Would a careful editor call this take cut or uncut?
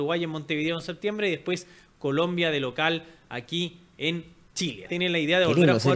cut